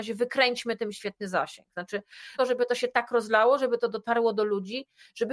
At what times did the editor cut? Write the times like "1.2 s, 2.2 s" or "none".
2.4 s

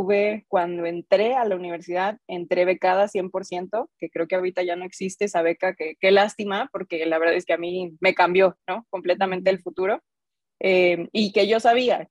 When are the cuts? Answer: none

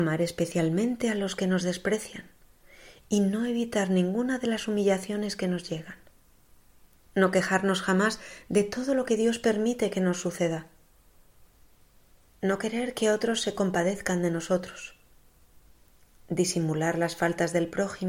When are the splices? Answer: 7.1 s

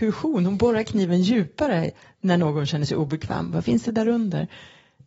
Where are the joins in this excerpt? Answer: 3.5 s

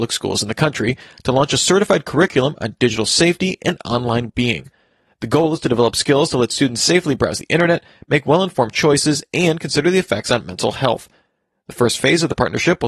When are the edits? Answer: 4.3 s

